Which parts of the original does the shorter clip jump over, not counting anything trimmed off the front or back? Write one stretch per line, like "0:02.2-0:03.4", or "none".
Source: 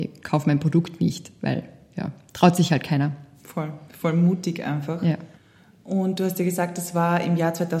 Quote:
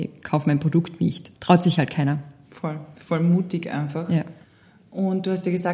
0:01.3-0:02.3